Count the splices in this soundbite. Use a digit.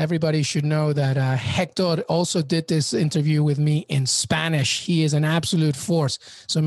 0